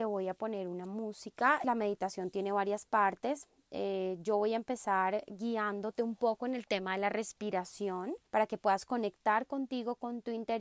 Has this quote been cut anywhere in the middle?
yes; 2 cuts; at 1.6 s, 8.3 s

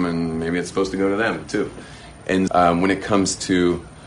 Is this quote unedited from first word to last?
no; 1 cut; at 2.5 s

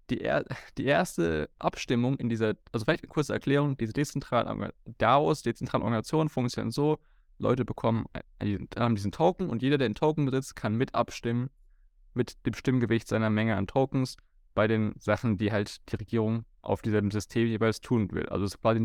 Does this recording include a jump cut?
no; 0 cuts

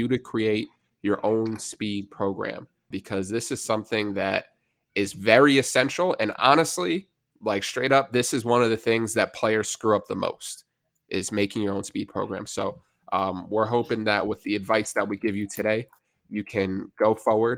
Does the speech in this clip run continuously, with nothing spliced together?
no; 1 cut; at 2.9 s

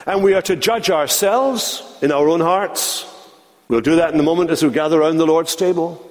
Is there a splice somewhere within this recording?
no; 0 cuts

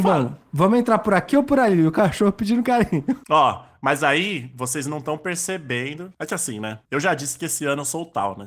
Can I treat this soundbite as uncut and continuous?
yes; 0 cuts

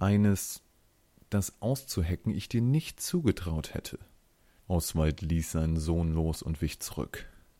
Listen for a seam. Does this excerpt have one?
yes; 1 cut; at 4.6 s

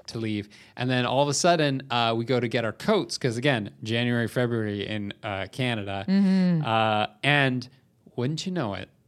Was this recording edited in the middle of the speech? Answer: no; 0 cuts

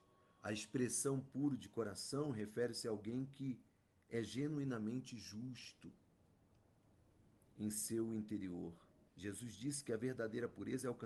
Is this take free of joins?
no; 1 cut; at 9.1 s

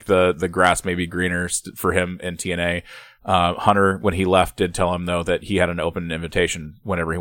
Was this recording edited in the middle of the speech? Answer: no; 0 cuts

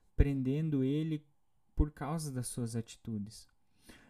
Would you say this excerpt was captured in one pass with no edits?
yes; 0 cuts

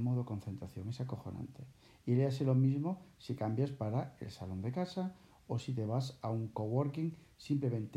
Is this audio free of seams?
yes; 0 cuts

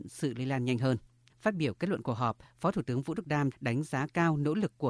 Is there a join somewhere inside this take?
yes; 2 cuts; at 1.3 s, 3.5 s

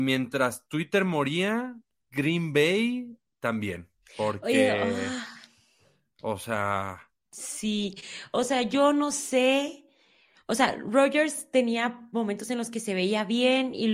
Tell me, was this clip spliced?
no; 0 cuts

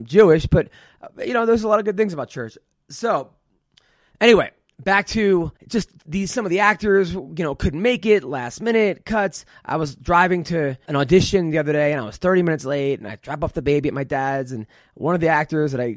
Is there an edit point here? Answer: yes; 2 cuts; at 5.6 s, 10.9 s

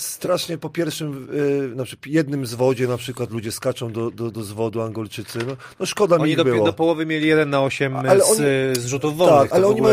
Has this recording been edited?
no; 0 cuts

